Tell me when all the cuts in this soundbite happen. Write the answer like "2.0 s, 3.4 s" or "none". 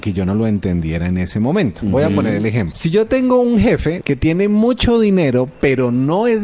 2.7 s, 4.0 s